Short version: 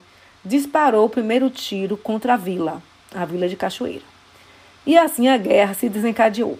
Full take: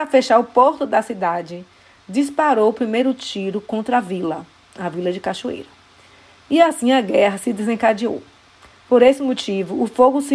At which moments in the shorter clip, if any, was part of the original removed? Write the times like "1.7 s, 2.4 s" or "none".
none